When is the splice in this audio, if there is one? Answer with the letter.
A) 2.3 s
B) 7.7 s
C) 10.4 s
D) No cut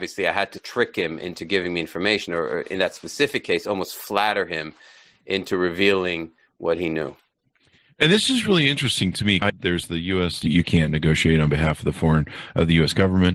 C